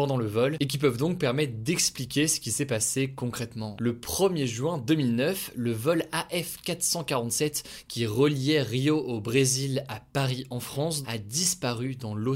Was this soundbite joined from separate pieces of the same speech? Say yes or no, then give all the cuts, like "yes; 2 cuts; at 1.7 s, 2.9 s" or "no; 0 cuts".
yes; 2 cuts; at 3.7 s, 11.0 s